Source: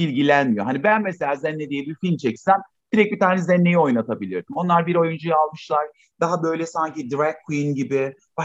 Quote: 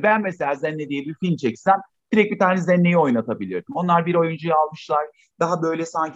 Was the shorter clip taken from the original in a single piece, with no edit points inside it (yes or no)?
yes